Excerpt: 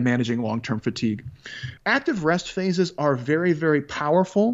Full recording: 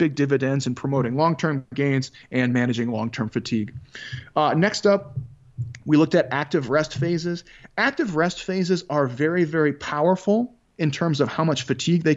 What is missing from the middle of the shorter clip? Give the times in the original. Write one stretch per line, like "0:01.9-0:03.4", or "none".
0:04.3-0:07.7